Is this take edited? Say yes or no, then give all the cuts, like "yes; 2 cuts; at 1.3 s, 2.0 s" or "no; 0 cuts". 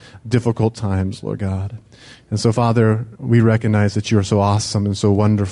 no; 0 cuts